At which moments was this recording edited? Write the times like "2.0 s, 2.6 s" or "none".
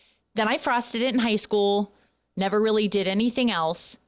none